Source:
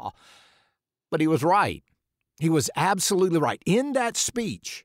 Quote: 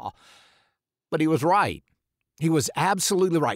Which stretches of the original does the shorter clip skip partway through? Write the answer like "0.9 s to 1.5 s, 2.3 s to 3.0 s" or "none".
none